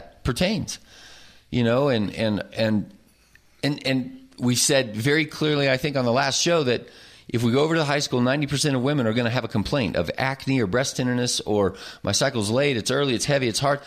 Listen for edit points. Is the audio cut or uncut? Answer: uncut